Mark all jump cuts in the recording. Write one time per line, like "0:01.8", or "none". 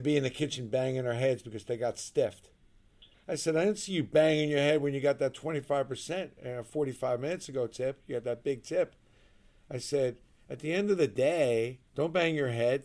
0:11.9